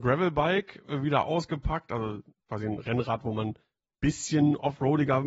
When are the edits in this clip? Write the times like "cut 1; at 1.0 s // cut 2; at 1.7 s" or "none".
none

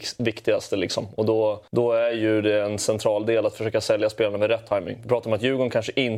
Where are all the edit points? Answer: cut 1; at 1.7 s

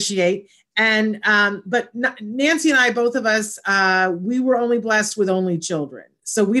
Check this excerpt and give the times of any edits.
none

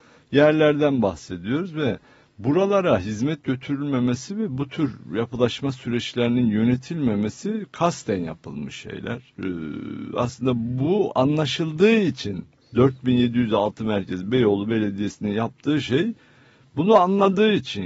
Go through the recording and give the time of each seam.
cut 1; at 9.3 s

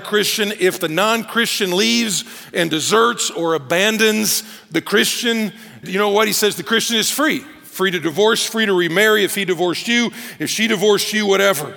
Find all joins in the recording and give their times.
cut 1; at 5.8 s

